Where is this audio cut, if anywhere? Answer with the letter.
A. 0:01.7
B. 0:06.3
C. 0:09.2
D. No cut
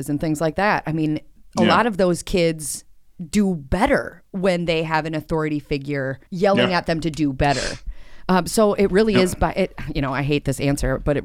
B